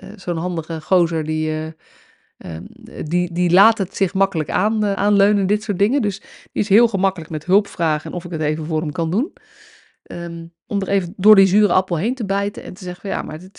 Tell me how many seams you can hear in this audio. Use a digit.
2